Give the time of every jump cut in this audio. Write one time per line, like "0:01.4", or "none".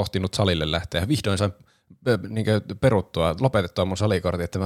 none